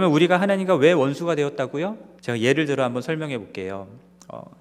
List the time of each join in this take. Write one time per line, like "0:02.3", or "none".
0:02.2